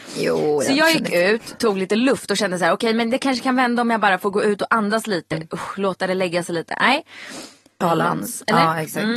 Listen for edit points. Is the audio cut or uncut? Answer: cut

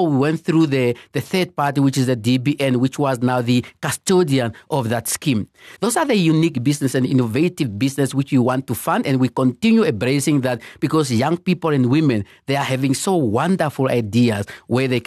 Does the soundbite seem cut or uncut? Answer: cut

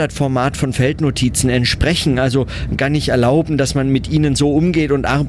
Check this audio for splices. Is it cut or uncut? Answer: uncut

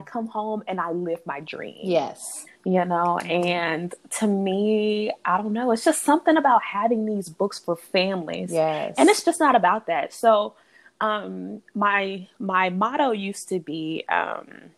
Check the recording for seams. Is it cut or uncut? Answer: uncut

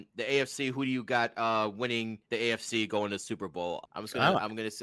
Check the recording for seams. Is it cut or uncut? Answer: cut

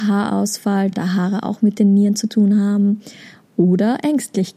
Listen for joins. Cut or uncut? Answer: uncut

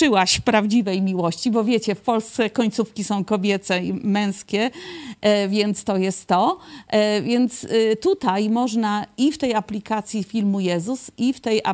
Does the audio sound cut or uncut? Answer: uncut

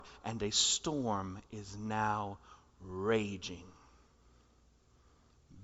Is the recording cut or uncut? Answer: uncut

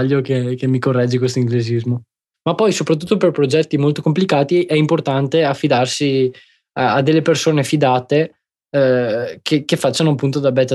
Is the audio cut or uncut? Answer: cut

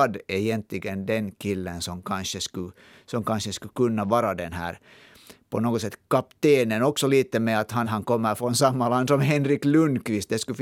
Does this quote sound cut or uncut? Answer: cut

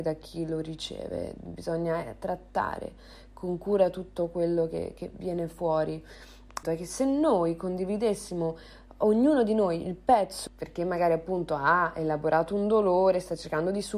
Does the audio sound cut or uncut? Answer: cut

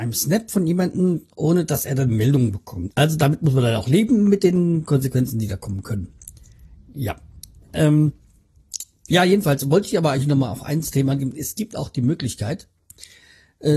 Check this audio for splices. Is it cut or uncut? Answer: cut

